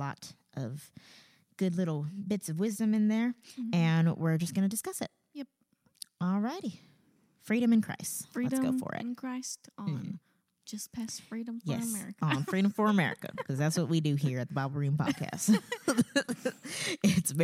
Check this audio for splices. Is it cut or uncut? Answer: uncut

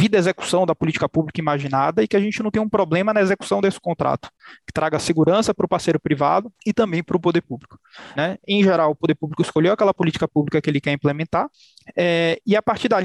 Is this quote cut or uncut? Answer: cut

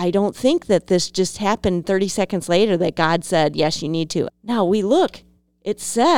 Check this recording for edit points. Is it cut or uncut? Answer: cut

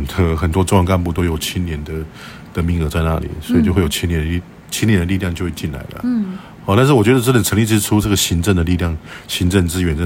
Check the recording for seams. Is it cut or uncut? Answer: uncut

